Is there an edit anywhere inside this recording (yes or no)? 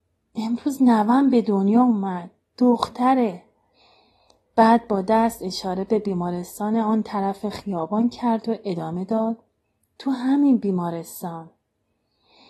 no